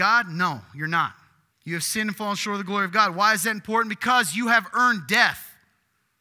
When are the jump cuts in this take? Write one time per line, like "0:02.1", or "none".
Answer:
0:01.5